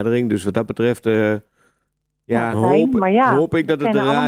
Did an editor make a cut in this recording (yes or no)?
yes